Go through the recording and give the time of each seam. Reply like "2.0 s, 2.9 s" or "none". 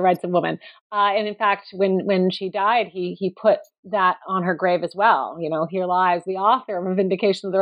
none